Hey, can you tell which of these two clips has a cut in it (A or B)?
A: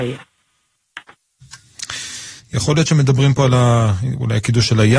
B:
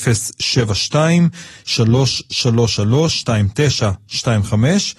A